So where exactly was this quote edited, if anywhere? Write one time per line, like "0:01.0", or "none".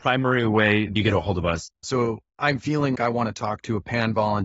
0:01.8
0:02.9